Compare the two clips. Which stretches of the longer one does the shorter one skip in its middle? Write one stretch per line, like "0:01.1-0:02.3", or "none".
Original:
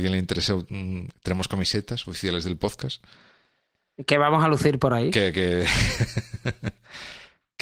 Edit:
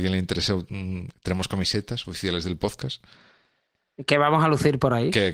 none